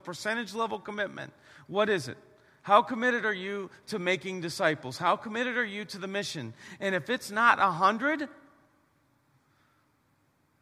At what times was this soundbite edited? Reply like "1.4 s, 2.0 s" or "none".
none